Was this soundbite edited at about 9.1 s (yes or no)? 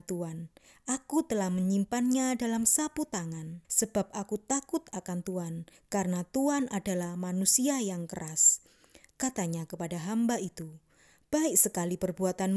yes